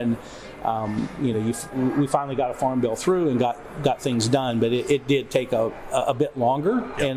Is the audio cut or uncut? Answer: uncut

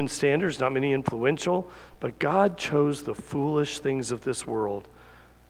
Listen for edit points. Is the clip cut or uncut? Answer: cut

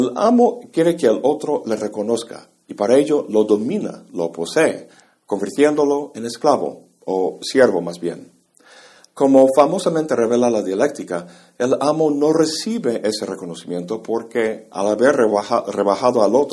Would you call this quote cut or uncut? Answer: uncut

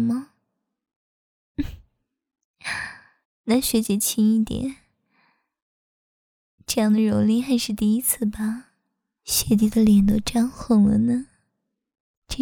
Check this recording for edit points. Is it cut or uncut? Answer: cut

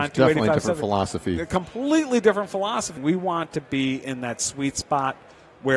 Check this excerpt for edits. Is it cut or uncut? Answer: cut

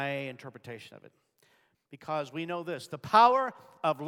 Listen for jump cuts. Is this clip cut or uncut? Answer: cut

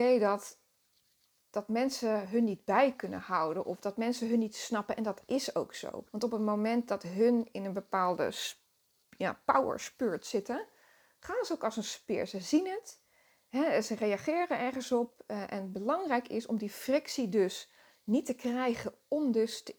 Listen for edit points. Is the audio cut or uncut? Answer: cut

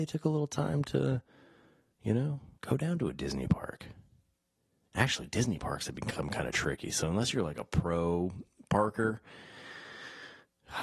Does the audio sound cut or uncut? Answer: cut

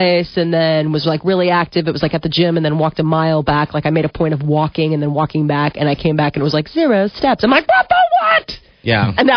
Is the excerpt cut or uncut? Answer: uncut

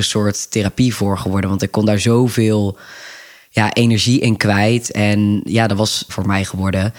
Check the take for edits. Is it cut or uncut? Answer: cut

